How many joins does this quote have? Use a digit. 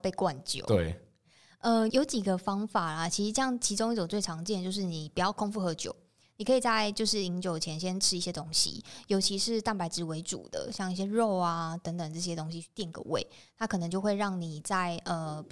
1